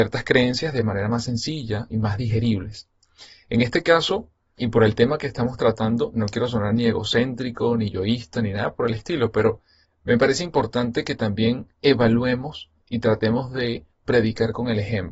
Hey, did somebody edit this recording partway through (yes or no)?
yes